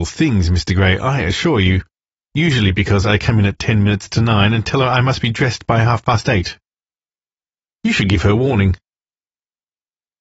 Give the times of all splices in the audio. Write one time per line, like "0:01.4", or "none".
0:07.7